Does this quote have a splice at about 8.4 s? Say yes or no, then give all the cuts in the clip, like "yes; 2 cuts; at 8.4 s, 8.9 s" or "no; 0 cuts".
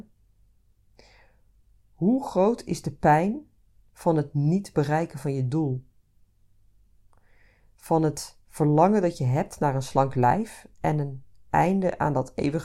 yes; 2 cuts; at 8.4 s, 10.7 s